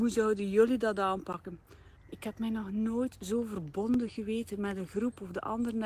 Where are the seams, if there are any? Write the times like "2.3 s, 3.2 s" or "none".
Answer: 2.0 s